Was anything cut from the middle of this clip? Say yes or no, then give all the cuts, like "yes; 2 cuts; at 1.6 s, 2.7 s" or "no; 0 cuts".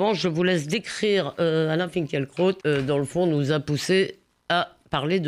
yes; 1 cut; at 2.6 s